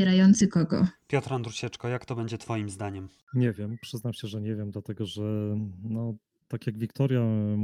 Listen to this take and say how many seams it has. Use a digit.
0